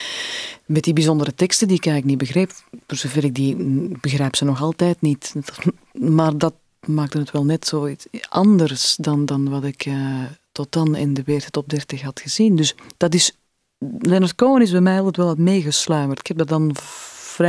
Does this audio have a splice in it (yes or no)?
no